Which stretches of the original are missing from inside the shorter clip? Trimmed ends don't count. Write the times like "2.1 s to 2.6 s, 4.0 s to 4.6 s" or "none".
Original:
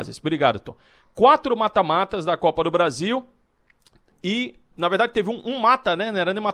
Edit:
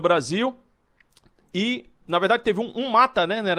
none